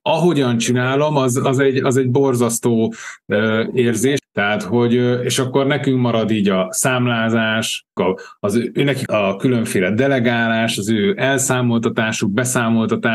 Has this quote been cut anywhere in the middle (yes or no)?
yes